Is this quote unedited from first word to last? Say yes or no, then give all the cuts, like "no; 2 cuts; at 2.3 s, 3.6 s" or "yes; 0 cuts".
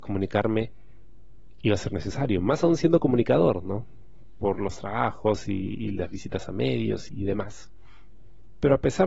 no; 1 cut; at 7.1 s